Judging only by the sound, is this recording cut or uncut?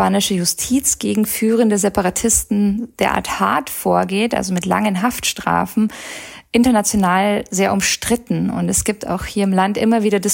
uncut